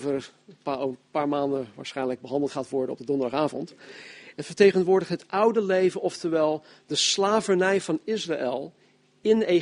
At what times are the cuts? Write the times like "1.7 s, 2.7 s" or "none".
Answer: 4.3 s